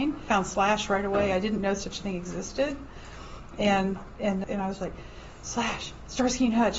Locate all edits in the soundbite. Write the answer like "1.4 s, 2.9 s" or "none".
4.4 s